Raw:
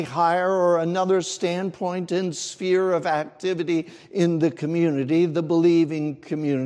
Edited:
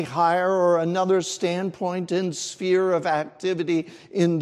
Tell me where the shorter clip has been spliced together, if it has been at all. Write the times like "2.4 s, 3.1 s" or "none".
none